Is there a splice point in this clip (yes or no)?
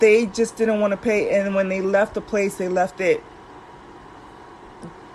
no